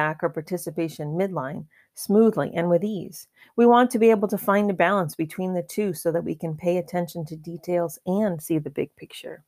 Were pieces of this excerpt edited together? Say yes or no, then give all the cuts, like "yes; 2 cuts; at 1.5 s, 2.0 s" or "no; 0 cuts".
no; 0 cuts